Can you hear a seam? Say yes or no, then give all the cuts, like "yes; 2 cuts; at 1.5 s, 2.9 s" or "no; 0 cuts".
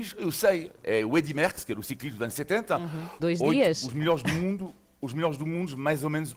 yes; 1 cut; at 3.2 s